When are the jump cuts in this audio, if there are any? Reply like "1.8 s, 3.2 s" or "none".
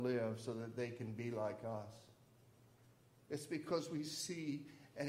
none